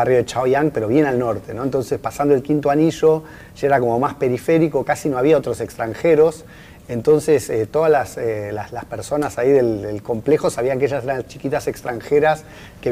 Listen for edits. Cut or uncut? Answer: uncut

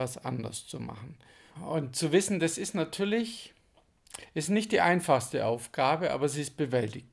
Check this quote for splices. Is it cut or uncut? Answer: cut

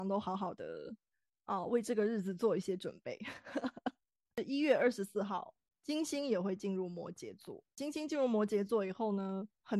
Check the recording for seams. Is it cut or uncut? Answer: uncut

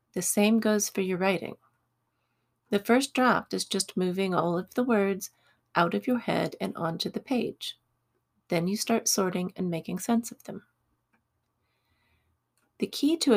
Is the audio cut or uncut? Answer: uncut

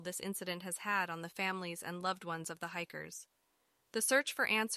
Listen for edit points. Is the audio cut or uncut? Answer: uncut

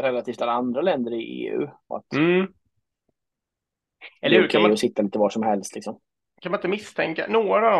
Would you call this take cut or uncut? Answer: cut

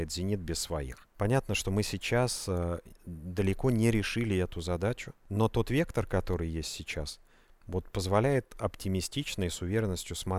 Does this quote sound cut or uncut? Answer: uncut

